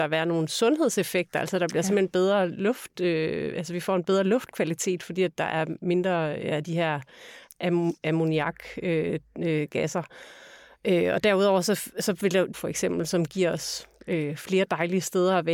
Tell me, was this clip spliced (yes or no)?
yes